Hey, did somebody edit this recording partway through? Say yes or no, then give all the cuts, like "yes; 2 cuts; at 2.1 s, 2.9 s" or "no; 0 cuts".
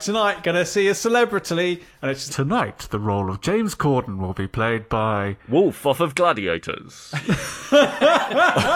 yes; 1 cut; at 2.3 s